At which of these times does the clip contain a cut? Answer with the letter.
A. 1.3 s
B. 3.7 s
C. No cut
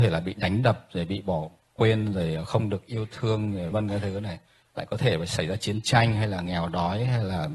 B